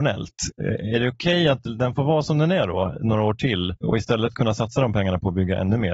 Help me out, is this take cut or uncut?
cut